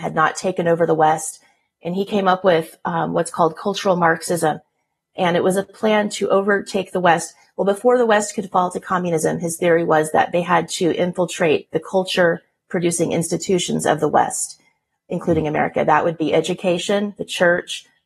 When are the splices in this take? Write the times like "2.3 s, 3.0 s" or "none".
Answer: none